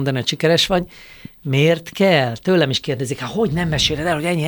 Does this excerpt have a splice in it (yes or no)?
no